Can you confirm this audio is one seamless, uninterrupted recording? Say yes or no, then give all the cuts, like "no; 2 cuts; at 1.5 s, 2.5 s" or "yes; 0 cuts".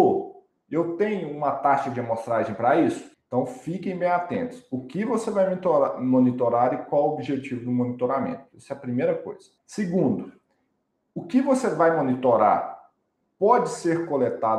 no; 2 cuts; at 3.1 s, 9.6 s